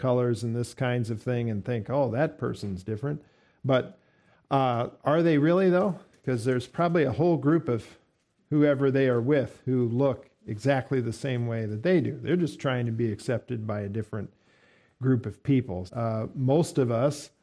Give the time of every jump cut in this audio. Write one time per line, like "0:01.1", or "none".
0:15.9